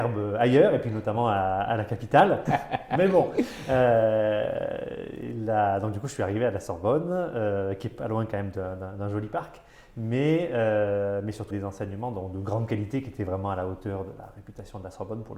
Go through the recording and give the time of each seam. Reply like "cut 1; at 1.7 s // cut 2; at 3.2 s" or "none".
cut 1; at 2.5 s // cut 2; at 11.5 s